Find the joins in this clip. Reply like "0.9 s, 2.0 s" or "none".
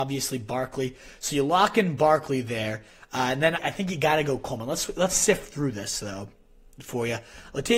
3.6 s